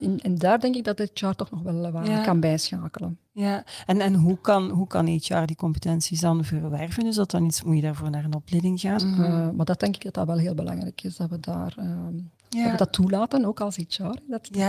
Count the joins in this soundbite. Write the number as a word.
one